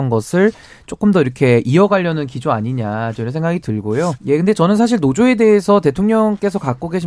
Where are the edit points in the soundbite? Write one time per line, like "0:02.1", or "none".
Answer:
0:04.2